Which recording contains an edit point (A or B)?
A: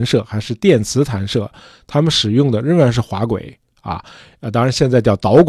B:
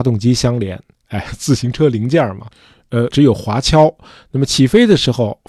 B